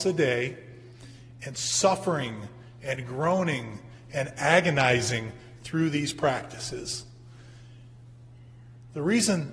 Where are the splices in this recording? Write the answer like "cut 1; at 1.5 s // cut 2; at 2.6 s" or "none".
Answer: none